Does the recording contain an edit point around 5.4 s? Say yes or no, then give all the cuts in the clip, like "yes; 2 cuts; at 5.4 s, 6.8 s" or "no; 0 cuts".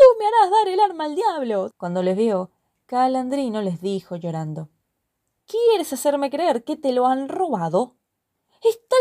yes; 2 cuts; at 1.7 s, 5.4 s